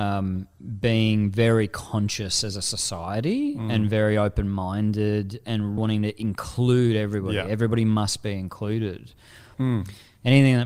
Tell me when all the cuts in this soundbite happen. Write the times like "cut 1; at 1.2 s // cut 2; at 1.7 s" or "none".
cut 1; at 5.8 s // cut 2; at 9.5 s